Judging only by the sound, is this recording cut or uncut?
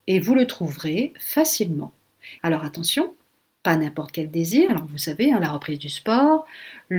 cut